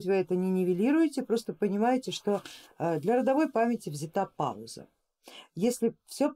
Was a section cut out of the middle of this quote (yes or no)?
no